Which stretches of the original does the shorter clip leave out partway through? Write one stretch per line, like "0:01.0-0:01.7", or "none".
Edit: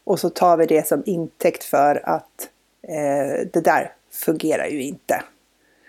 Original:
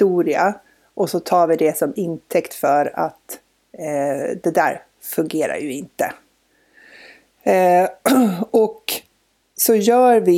none